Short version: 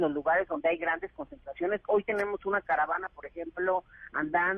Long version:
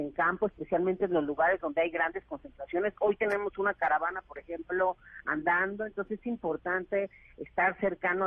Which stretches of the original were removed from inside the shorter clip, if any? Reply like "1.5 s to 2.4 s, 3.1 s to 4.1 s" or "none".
none